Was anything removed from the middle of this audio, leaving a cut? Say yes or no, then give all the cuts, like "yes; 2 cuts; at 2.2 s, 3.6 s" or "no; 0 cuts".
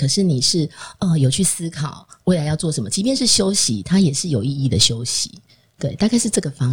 no; 0 cuts